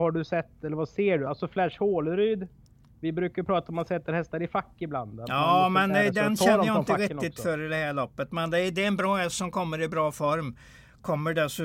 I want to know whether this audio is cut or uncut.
uncut